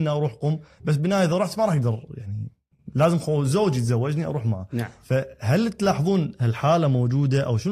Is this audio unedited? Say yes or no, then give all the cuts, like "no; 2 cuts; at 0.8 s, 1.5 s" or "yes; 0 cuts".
yes; 0 cuts